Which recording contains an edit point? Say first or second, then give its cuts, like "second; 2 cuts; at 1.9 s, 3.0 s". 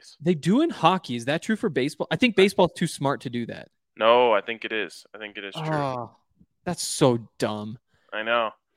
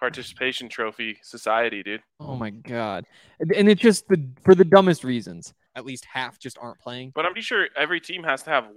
second; 3 cuts; at 2.1 s, 5.7 s, 7.3 s